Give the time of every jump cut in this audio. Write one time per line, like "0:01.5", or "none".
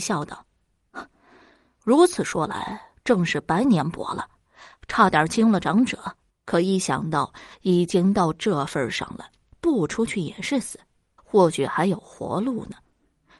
0:06.3
0:09.5
0:11.2